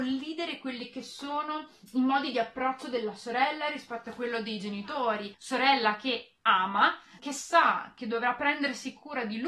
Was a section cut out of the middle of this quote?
yes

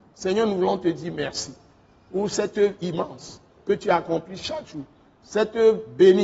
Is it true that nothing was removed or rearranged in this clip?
yes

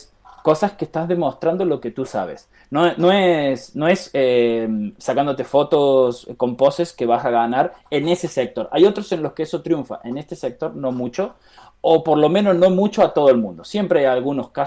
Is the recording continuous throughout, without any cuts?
yes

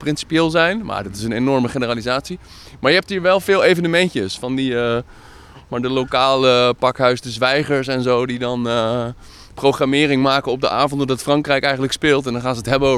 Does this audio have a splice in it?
no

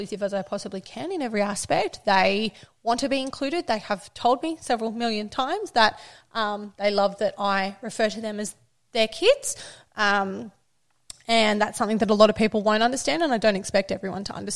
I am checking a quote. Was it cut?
no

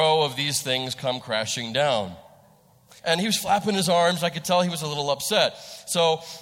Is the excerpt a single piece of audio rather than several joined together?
no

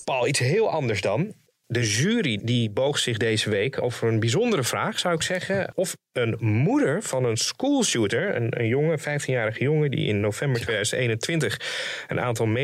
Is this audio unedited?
yes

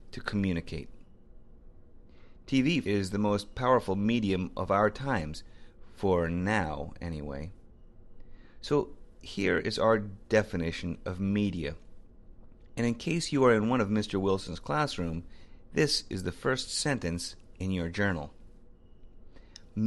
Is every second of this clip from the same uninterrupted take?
no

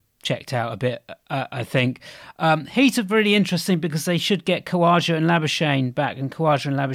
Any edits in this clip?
no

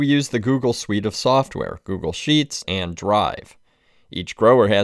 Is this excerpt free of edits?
no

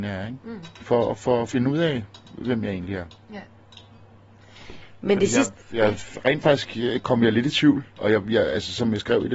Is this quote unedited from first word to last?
yes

